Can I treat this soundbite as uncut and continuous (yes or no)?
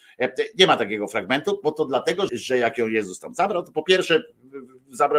no